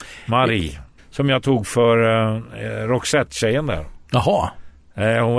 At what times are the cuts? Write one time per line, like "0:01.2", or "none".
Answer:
0:01.0